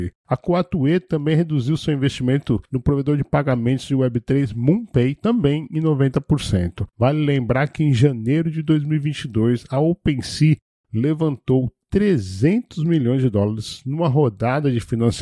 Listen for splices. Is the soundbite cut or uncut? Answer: uncut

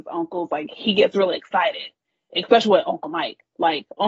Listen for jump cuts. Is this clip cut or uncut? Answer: uncut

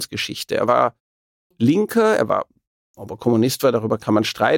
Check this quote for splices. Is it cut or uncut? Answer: uncut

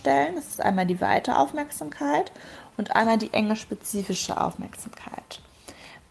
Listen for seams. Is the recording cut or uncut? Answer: uncut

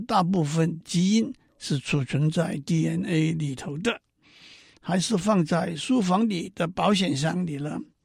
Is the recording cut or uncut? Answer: cut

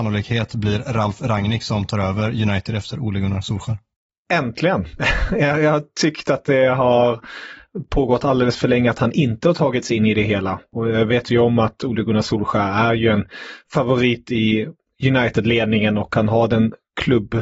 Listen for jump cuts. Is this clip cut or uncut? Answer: uncut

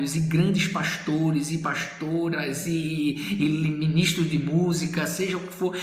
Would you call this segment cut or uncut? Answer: uncut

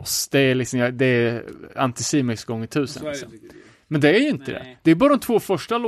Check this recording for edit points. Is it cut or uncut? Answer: uncut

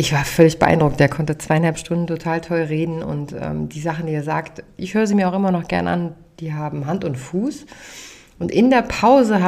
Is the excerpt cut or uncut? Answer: uncut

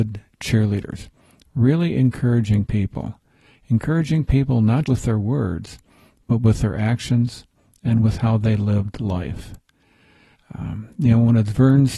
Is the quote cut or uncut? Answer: cut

